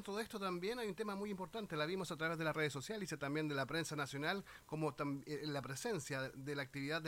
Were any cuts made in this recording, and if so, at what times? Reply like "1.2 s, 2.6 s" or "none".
none